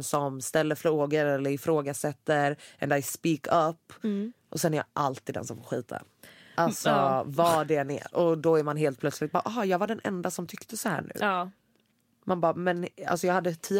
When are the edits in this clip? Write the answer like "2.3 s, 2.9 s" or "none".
none